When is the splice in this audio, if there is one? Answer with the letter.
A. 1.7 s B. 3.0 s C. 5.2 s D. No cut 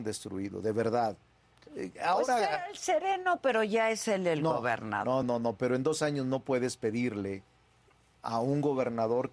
C